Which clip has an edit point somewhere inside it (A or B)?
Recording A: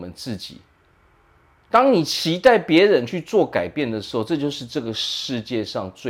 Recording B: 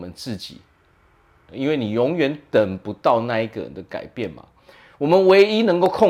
B